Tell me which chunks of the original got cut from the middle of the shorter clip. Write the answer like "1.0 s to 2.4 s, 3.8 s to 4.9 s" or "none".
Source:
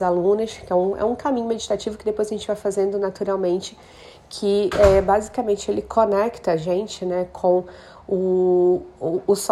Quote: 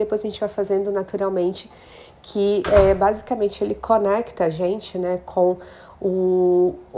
none

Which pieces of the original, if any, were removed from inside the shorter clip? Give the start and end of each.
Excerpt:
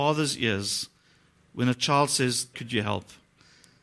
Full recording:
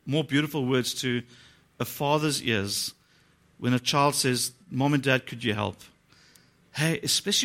4.6 s to 5.2 s

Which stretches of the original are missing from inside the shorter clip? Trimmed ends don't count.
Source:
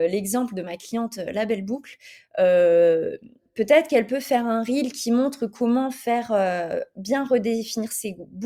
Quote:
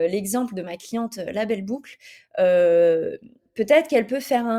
none

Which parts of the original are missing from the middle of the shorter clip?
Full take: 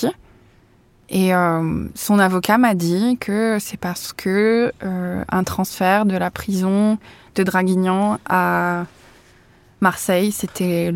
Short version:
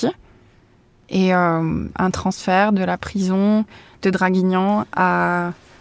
1.9 s to 5.3 s

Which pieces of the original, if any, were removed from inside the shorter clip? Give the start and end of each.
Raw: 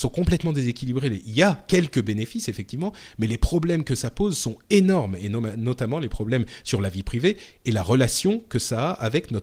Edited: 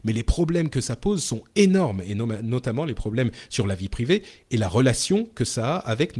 none

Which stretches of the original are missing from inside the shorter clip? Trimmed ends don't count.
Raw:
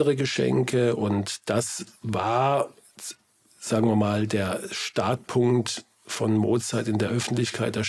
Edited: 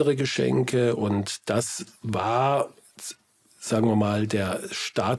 none

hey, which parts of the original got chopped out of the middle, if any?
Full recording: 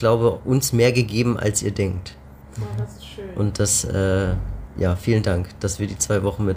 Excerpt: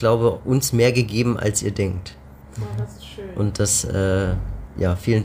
none

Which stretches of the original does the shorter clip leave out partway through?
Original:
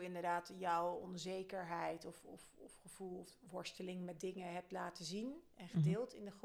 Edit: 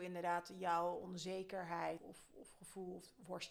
2.0 s to 2.2 s

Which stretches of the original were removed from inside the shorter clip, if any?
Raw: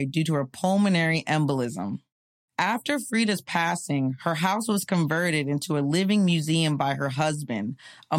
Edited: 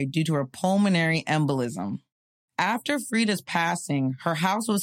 none

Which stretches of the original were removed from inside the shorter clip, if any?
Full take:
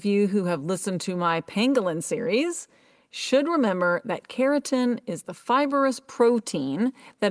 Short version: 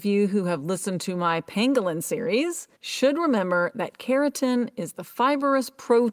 2.7 s to 3.0 s

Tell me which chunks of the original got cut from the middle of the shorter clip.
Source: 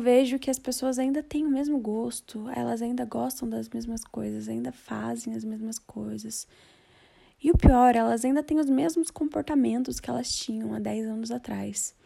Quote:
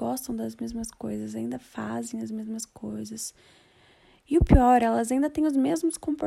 none

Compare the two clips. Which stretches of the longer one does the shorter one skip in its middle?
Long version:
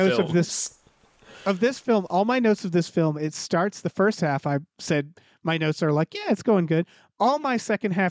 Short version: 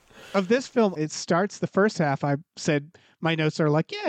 2.1 s to 3.2 s

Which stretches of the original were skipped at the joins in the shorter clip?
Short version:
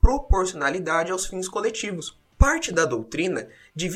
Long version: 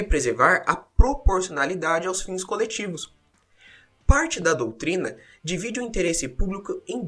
3.2 s to 3.9 s

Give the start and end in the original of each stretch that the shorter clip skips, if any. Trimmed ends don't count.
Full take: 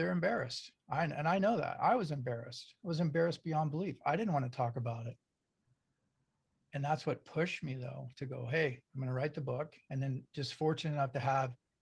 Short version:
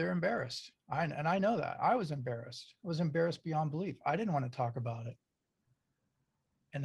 none

